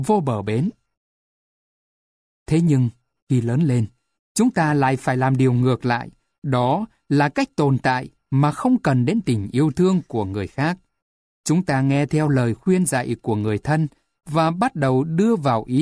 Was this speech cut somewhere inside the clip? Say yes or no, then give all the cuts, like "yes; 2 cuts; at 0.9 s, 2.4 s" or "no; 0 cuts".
no; 0 cuts